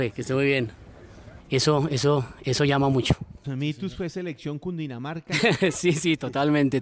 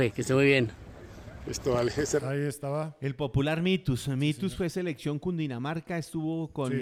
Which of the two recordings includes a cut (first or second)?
first